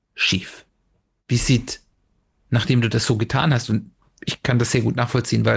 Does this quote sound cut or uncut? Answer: uncut